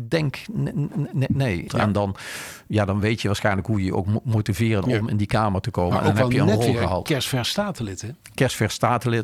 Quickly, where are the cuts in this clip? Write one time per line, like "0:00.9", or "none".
0:01.7